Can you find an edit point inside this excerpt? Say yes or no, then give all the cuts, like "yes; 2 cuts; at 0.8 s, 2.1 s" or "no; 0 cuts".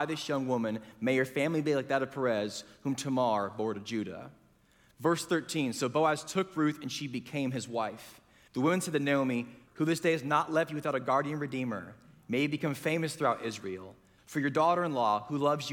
yes; 3 cuts; at 8.5 s, 9.7 s, 14.2 s